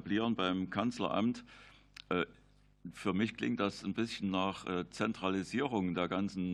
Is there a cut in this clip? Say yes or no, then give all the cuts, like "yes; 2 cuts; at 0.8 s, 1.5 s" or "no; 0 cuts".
no; 0 cuts